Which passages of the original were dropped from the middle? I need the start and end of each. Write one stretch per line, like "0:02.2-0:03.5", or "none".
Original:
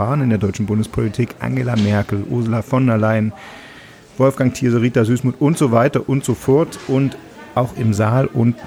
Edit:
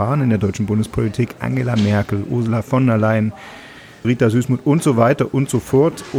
0:04.0-0:04.8